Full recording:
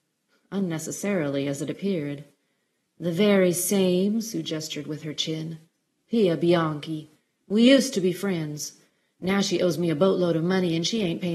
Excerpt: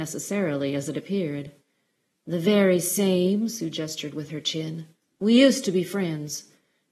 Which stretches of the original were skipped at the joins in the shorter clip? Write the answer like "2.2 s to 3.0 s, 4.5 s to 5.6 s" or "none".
5.8 s to 7.4 s